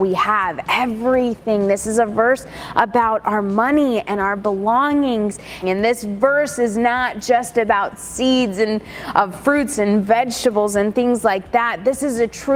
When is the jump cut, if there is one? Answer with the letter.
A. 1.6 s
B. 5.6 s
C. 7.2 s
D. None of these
B